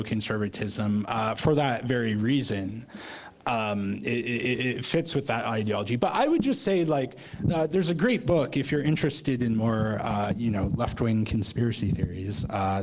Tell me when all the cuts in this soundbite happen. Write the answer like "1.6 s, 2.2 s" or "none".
none

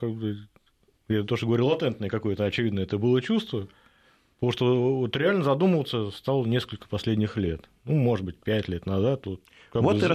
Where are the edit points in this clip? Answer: none

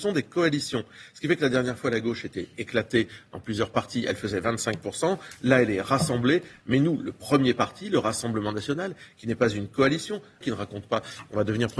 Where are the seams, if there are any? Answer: 6.6 s, 10.4 s

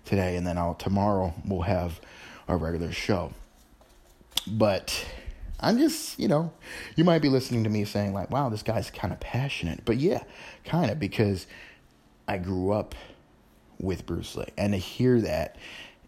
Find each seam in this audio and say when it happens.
none

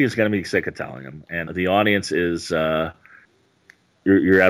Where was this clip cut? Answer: 1.4 s

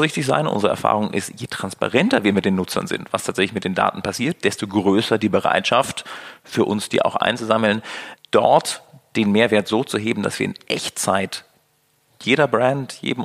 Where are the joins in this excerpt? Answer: none

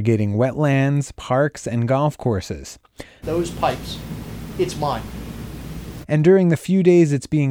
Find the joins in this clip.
3.2 s, 6.0 s

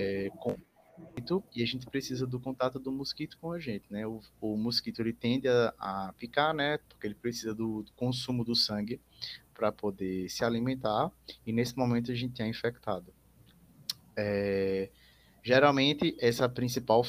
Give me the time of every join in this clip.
none

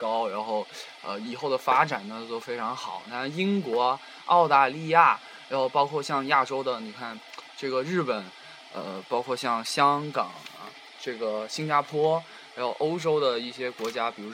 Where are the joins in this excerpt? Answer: none

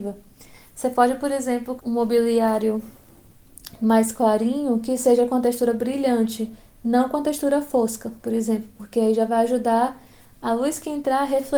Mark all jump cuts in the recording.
1.8 s

